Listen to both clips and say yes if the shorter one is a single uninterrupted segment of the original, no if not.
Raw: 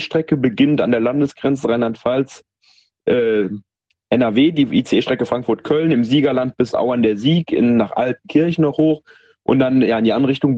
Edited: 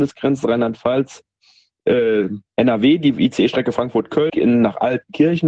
no